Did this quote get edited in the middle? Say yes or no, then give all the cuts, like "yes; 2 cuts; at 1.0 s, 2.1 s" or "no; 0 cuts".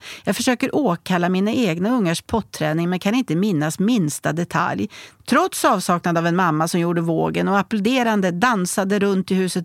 yes; 1 cut; at 5.2 s